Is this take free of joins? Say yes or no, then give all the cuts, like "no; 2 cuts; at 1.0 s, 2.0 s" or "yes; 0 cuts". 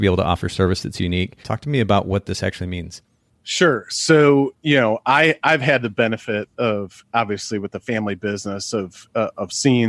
no; 1 cut; at 1.4 s